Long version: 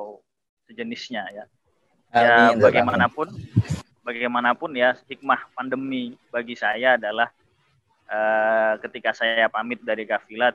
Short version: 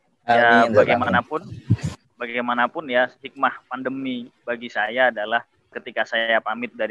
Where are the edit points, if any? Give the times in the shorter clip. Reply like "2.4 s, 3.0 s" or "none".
5.7 s